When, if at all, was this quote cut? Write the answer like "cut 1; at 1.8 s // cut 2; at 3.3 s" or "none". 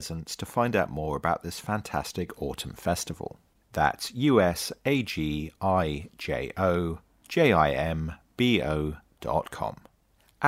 cut 1; at 3.6 s